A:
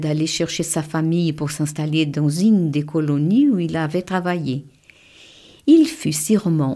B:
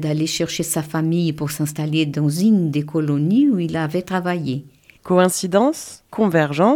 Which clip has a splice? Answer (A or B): B